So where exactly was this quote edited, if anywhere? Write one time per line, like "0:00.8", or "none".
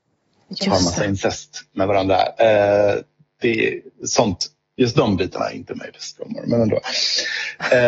none